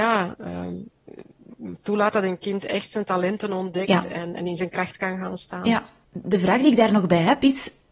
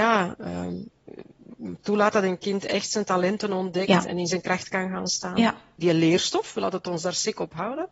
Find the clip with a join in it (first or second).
second